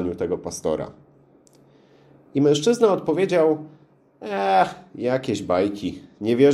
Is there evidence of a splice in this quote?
no; 0 cuts

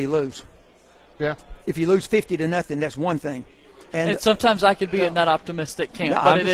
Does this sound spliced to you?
yes; 1 cut; at 3.9 s

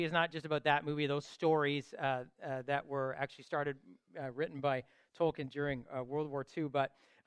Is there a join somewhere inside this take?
no; 0 cuts

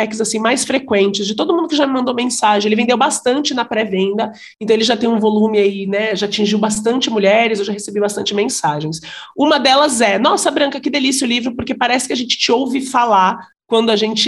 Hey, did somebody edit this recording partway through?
no; 0 cuts

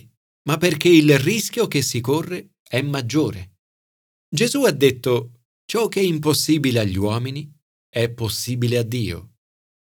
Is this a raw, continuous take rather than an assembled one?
no; 2 cuts; at 4.2 s, 5.5 s

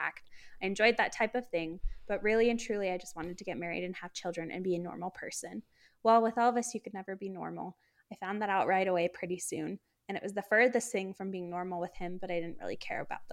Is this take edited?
no; 0 cuts

